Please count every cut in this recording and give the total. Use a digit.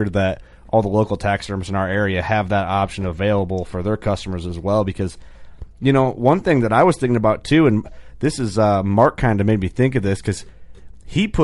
0